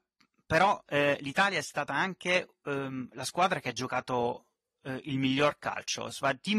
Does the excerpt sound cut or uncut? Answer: uncut